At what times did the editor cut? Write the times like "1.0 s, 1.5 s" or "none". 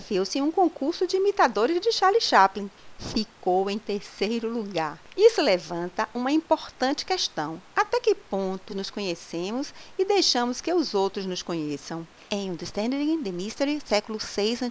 8.7 s, 12.3 s